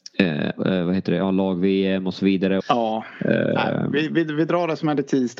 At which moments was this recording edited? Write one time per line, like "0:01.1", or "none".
0:02.6